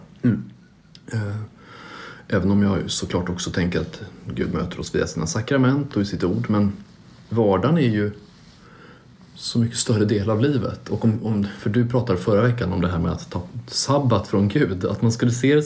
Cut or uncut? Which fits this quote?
uncut